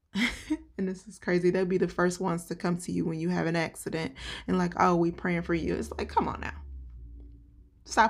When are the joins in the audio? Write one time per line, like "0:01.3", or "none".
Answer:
none